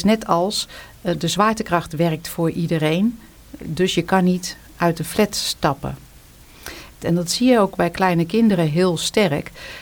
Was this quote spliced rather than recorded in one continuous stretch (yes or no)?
yes